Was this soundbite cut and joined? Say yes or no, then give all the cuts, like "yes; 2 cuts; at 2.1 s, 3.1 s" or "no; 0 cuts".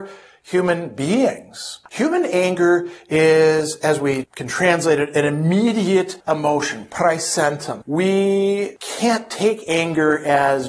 yes; 2 cuts; at 1.9 s, 7.8 s